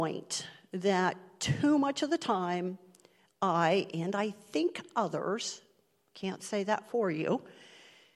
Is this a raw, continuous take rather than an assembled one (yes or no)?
yes